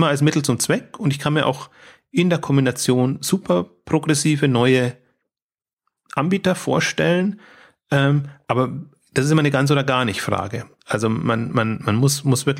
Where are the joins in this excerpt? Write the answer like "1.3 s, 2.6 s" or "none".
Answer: none